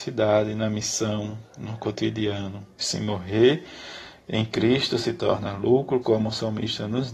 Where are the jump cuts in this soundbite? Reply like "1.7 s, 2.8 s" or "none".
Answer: 2.8 s, 6.0 s